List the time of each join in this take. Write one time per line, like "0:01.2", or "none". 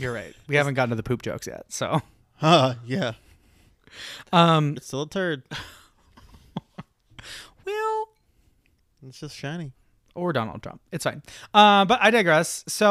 0:04.8